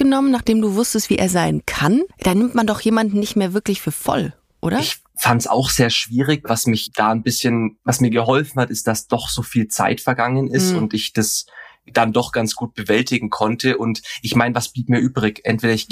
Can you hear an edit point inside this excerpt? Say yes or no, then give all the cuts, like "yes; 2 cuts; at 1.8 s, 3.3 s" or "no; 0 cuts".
no; 0 cuts